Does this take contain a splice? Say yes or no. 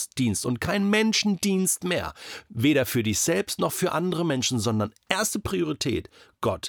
no